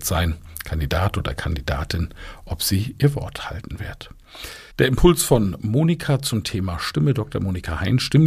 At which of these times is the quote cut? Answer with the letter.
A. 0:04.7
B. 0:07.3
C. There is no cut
A